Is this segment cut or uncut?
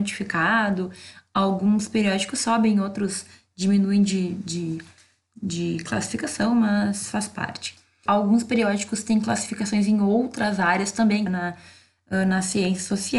cut